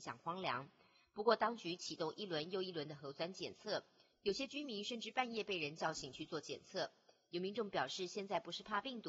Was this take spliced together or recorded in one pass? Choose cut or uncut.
uncut